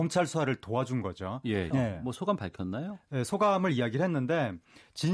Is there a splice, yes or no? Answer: yes